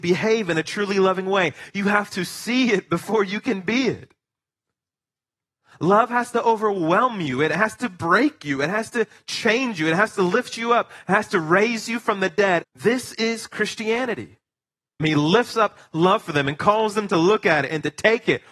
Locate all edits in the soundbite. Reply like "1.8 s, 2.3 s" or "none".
12.6 s, 15.0 s

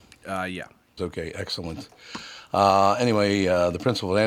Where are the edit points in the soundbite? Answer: 1.0 s

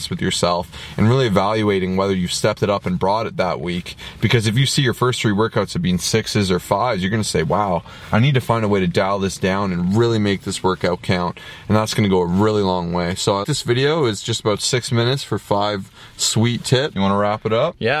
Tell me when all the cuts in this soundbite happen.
13.4 s, 16.9 s

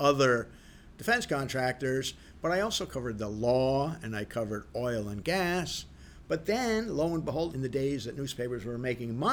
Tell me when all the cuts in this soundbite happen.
7.5 s

